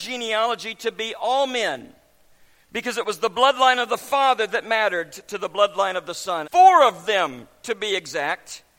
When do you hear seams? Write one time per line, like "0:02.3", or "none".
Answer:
0:06.4